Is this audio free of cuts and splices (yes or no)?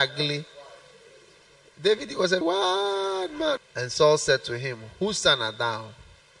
no